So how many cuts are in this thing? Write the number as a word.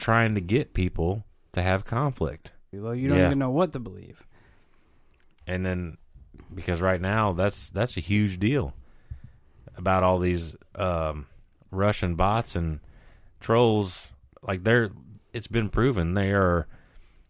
one